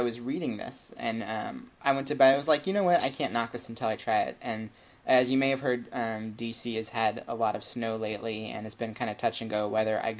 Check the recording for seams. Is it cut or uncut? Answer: uncut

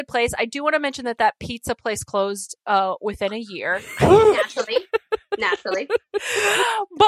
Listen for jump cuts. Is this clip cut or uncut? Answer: uncut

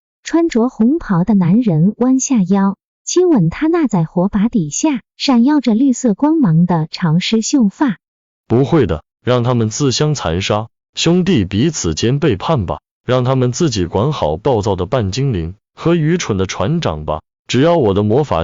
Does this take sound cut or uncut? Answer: cut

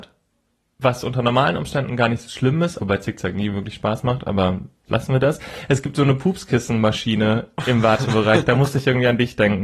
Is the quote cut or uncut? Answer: cut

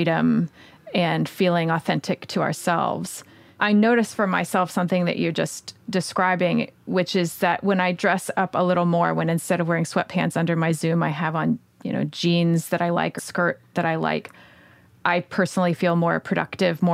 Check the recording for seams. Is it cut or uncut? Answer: cut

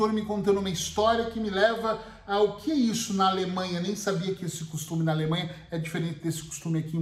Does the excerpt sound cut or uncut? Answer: uncut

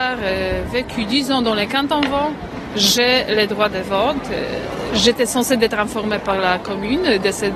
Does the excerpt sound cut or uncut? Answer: uncut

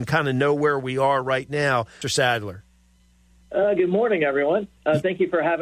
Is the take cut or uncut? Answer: cut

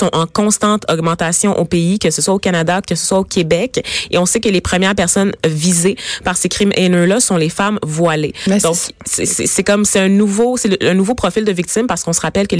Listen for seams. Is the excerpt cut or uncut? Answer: uncut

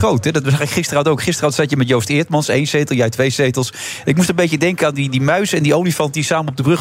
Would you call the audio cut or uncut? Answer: uncut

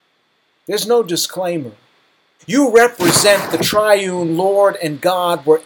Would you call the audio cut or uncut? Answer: cut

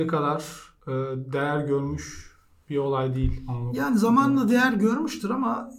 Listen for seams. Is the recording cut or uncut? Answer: uncut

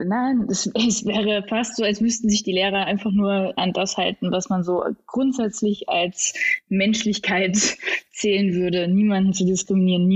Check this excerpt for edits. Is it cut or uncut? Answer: uncut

